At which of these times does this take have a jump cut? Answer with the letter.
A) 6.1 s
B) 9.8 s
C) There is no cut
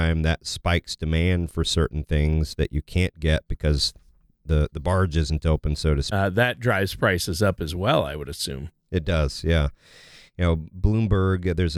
A